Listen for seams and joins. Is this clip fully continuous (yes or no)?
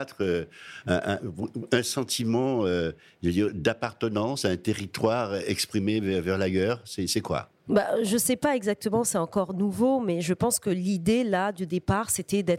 yes